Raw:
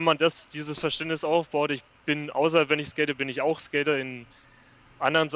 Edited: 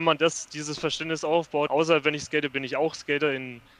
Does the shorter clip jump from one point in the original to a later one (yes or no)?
yes